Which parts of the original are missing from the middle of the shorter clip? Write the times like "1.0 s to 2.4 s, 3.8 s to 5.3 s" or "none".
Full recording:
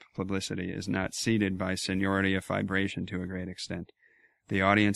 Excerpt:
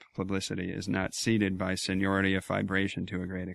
none